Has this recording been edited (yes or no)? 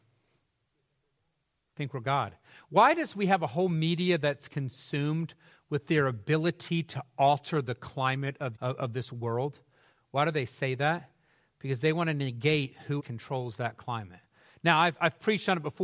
yes